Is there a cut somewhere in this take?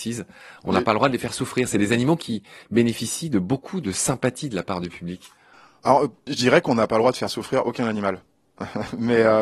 no; 0 cuts

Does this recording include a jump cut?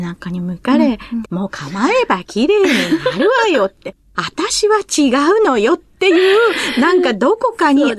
yes; 1 cut; at 1.2 s

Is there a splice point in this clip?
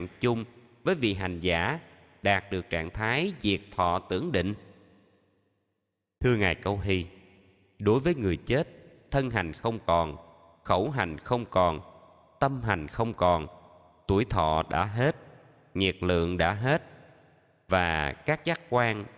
no; 0 cuts

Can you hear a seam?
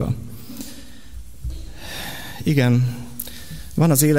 no; 0 cuts

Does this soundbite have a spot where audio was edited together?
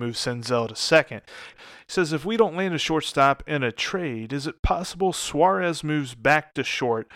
yes; 1 cut; at 1.5 s

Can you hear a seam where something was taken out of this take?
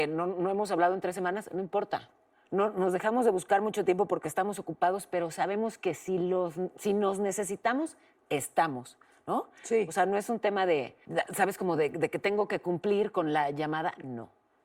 no; 0 cuts

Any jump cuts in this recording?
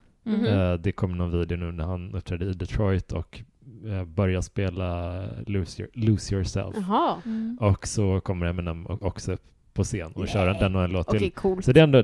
no; 0 cuts

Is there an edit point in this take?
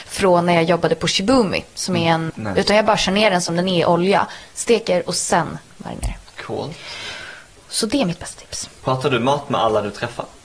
yes; 1 cut; at 2.3 s

